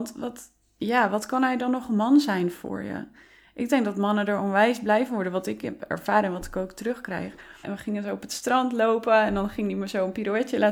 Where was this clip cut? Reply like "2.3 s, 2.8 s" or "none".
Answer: 7.6 s